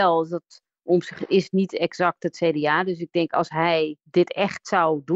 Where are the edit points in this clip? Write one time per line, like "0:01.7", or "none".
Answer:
0:04.0